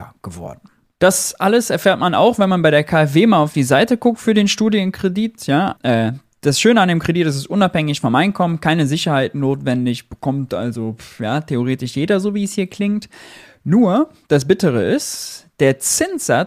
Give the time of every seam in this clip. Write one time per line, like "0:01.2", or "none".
0:05.8